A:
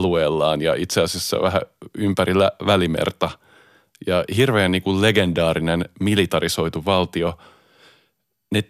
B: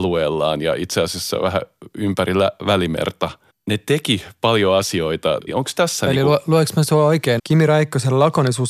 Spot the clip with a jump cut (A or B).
B